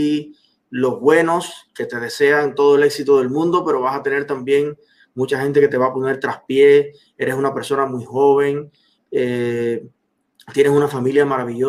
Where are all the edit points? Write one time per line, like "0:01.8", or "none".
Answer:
none